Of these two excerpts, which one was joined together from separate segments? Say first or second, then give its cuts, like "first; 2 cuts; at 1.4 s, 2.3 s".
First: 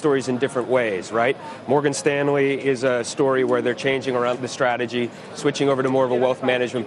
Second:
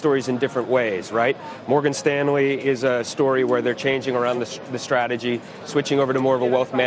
first; 1 cut; at 4.3 s